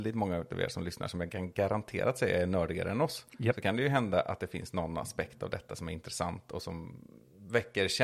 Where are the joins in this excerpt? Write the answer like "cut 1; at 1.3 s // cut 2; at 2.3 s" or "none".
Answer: none